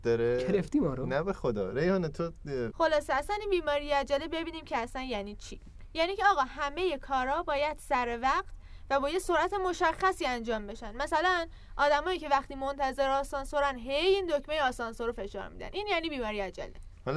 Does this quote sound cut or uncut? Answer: cut